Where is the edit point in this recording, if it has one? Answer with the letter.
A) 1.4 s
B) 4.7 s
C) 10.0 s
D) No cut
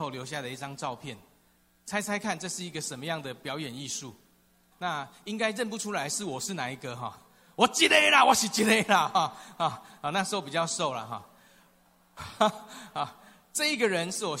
B